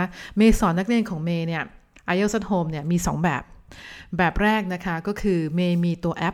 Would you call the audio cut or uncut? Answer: uncut